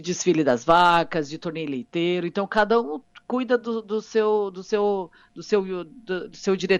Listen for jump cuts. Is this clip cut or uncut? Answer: uncut